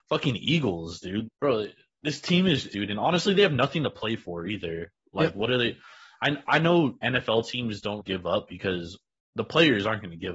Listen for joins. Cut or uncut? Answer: cut